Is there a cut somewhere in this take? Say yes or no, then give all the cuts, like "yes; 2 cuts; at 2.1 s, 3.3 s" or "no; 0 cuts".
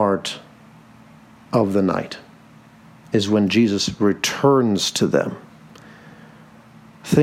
no; 0 cuts